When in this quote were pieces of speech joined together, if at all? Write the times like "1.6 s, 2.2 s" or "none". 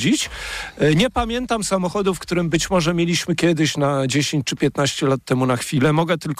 none